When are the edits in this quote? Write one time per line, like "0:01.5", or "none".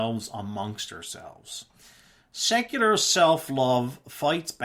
none